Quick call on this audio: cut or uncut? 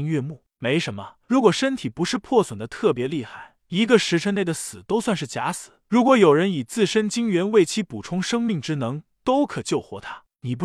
cut